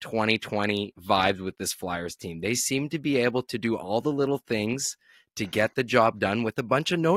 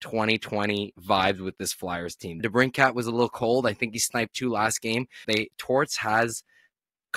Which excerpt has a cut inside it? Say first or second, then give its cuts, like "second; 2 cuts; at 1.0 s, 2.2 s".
second; 2 cuts; at 2.4 s, 5.2 s